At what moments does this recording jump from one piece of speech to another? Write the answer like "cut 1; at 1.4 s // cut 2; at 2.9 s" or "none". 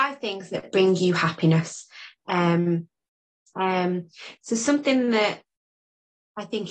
cut 1; at 3.5 s